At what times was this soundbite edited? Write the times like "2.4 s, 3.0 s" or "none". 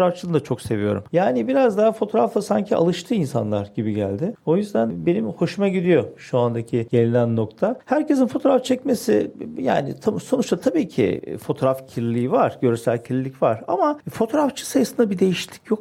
1.1 s